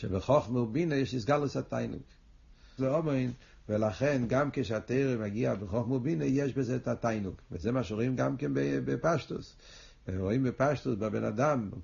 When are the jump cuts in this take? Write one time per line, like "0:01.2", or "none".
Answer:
0:02.8